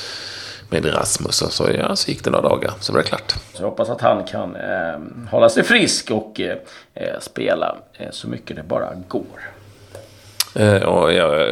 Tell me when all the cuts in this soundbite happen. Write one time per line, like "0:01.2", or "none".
0:03.5